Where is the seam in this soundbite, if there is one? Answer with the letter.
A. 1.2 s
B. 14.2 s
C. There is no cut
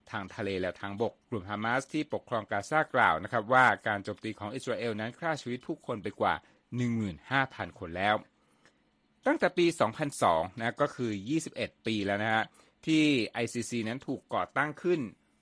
A